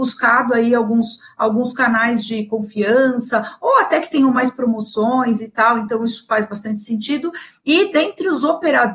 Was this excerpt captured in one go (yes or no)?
yes